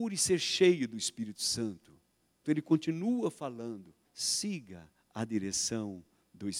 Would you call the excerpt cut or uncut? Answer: cut